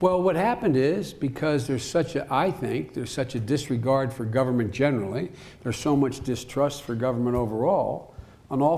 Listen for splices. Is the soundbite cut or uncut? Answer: uncut